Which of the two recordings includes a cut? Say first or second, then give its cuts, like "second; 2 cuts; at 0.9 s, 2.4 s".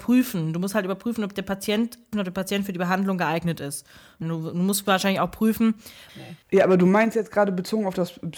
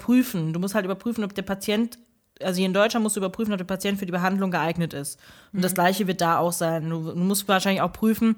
first; 3 cuts; at 2.1 s, 4.2 s, 6.1 s